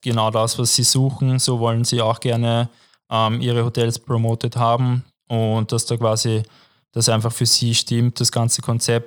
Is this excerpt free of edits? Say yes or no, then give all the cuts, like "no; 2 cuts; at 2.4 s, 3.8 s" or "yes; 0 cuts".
yes; 0 cuts